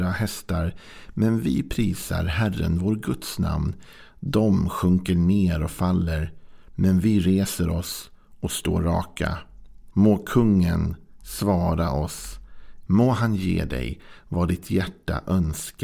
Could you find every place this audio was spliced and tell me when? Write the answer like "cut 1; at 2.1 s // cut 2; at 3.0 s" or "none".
cut 1; at 9.9 s // cut 2; at 12.9 s